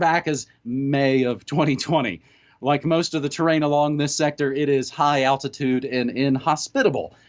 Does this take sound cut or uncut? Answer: uncut